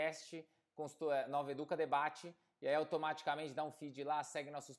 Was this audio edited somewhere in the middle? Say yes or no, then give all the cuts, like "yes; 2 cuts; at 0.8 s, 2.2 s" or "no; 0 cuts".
no; 0 cuts